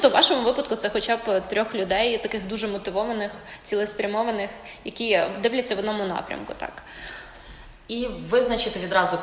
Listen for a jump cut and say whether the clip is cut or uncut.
uncut